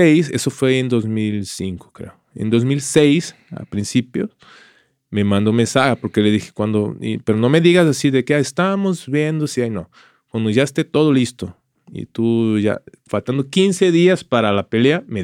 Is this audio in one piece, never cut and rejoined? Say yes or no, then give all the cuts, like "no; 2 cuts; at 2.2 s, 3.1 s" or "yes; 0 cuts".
yes; 0 cuts